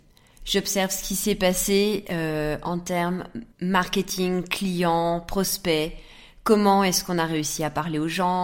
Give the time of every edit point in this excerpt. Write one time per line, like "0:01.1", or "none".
0:03.5